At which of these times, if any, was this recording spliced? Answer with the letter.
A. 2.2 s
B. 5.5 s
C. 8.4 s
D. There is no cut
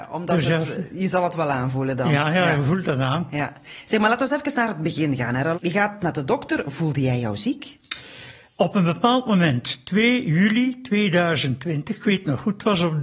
B